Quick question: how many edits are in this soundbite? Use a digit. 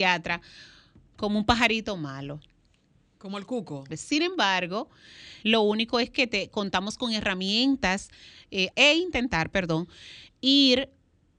3